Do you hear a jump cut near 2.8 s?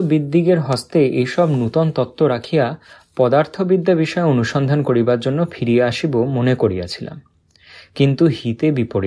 no; 0 cuts

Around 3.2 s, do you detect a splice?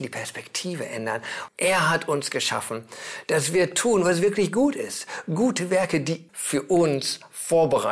no; 2 cuts; at 1.5 s, 6.3 s

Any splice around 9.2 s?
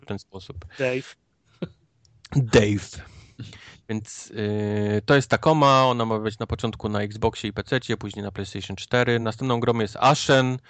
no; 0 cuts

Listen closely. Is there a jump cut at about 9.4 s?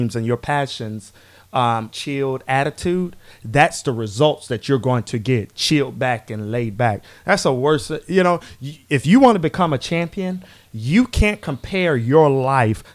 no; 2 cuts; at 1.9 s, 7.2 s

